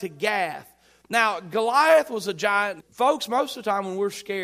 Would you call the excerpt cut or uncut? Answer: cut